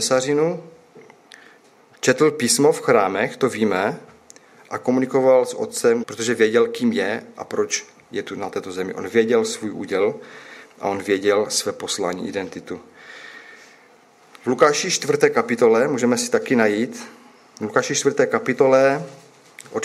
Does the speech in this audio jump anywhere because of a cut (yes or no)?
yes